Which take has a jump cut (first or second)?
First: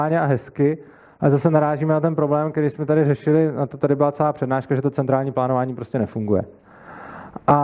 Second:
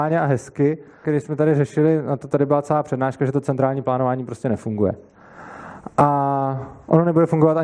second